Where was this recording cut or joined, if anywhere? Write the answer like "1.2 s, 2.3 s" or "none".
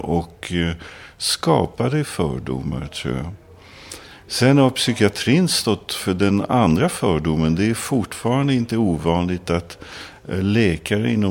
none